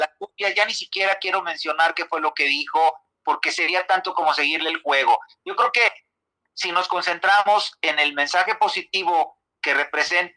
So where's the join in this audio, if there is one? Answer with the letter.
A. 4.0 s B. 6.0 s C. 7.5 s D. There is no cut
D